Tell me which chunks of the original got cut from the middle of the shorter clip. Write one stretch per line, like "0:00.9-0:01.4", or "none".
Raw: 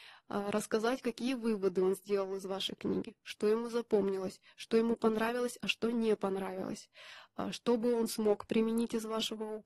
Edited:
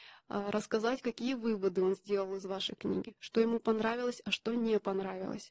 0:03.2-0:04.5